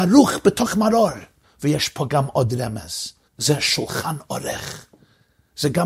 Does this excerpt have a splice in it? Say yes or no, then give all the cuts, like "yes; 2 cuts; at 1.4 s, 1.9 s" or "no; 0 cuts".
yes; 2 cuts; at 1.4 s, 3.3 s